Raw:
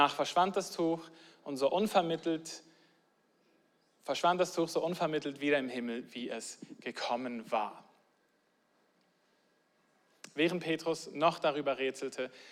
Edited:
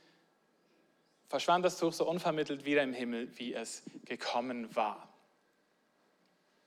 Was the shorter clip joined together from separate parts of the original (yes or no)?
no